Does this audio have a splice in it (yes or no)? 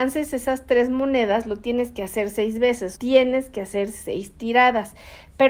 yes